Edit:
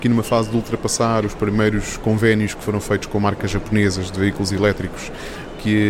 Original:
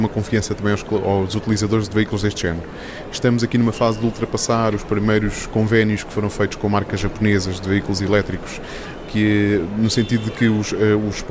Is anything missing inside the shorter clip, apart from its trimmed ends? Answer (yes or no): no